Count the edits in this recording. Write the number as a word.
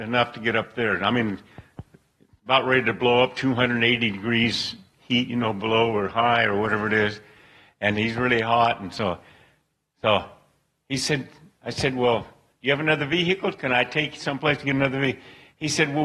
zero